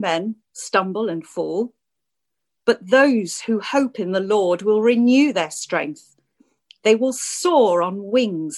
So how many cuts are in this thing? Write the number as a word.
zero